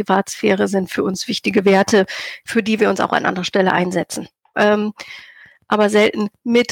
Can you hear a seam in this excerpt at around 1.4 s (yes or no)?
no